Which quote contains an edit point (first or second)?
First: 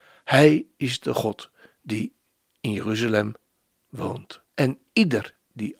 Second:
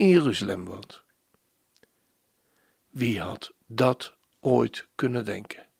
first